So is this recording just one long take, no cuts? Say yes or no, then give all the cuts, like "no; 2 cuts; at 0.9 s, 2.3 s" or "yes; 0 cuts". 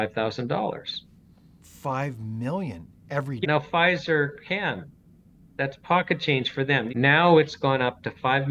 no; 3 cuts; at 1.6 s, 3.4 s, 6.9 s